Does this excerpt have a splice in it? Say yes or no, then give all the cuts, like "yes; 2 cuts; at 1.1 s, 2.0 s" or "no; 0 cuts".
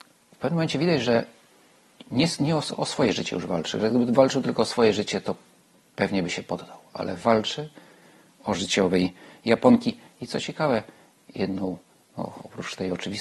no; 0 cuts